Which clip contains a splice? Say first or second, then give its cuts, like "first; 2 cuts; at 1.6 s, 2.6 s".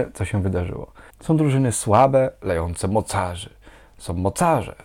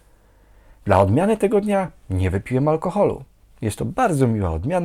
first; 1 cut; at 1.1 s